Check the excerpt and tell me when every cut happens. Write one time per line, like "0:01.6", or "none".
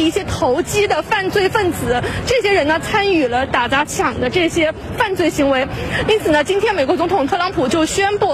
0:06.1